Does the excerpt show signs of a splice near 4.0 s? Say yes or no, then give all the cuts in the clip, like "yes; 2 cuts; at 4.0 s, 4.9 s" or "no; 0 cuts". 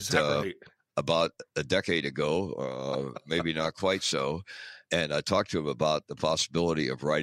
no; 0 cuts